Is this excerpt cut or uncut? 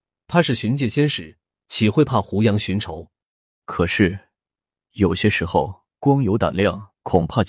cut